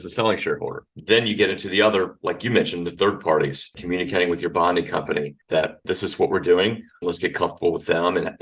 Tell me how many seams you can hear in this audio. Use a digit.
1